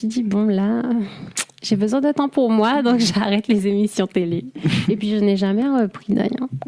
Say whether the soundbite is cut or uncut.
uncut